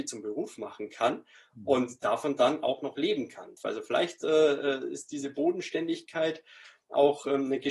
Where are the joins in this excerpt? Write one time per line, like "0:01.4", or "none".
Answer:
0:03.6